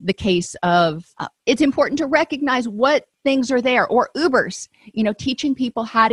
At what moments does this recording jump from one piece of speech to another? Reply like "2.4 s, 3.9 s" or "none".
1.1 s, 3.1 s